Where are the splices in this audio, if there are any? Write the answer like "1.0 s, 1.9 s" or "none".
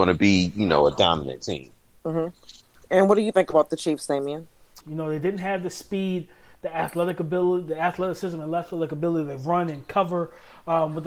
4.8 s